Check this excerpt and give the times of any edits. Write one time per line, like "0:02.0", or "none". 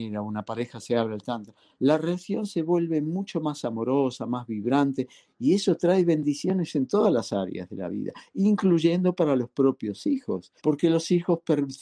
0:10.6